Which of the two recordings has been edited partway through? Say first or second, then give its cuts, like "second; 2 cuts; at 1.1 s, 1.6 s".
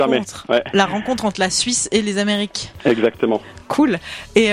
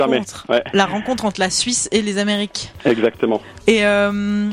second; 1 cut; at 3.6 s